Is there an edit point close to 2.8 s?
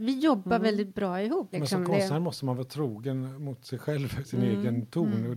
no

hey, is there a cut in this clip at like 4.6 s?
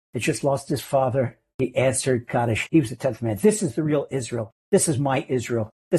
no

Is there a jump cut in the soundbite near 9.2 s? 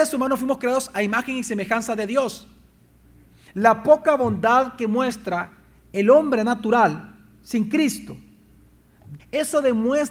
yes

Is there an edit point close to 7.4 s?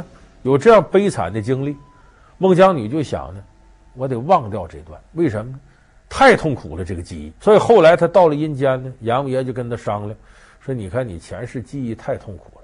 yes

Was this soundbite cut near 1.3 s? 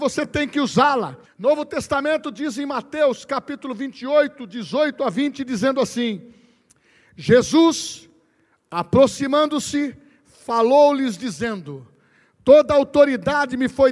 yes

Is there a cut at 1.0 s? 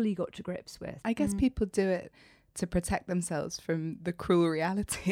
yes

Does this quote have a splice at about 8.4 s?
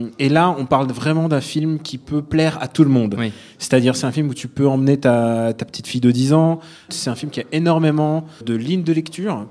yes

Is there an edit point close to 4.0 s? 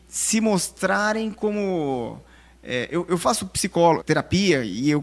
yes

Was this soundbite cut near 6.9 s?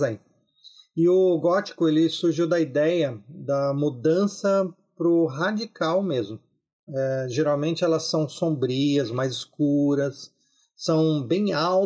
yes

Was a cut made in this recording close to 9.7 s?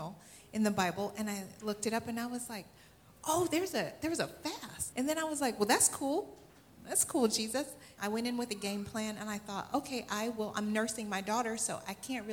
no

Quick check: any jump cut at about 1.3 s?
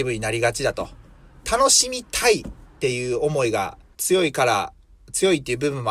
no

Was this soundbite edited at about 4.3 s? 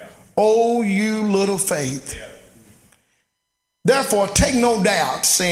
no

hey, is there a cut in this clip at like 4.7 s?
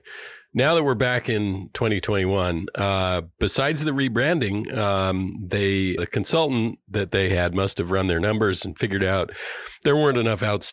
no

